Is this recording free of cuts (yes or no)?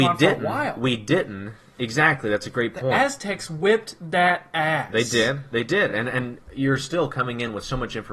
yes